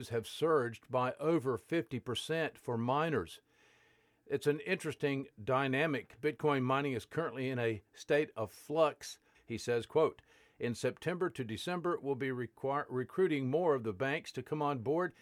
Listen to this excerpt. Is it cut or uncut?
cut